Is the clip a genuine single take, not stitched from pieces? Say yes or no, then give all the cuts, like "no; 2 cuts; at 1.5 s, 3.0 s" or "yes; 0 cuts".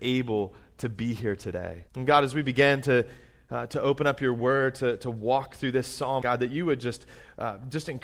no; 2 cuts; at 1.9 s, 6.2 s